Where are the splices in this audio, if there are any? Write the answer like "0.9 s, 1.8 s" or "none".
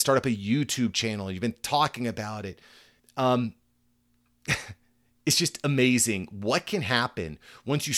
3.0 s

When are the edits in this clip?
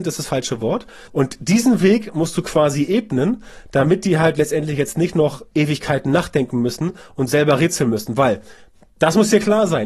1.1 s

